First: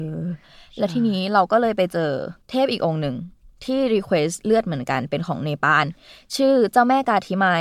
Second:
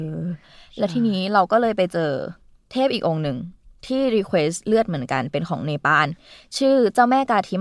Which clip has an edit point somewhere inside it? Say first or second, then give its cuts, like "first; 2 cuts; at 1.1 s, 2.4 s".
first; 1 cut; at 2.4 s